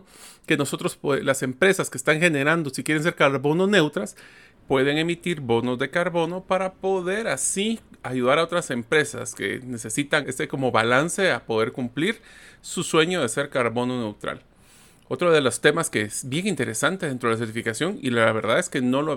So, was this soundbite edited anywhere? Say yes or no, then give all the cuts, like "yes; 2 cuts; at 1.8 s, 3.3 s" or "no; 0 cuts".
yes; 1 cut; at 10.2 s